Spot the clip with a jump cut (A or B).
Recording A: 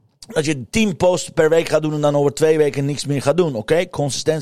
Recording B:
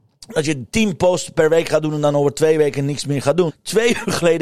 B